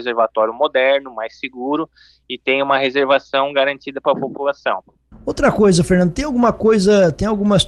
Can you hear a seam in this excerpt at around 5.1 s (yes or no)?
yes